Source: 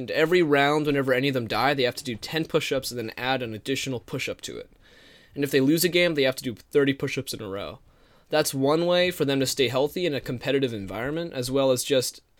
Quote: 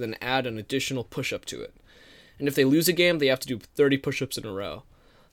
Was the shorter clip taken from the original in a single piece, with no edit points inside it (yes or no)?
yes